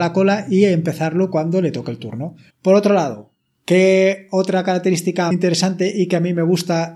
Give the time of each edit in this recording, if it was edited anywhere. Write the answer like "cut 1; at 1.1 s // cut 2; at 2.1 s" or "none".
cut 1; at 2.5 s // cut 2; at 5.3 s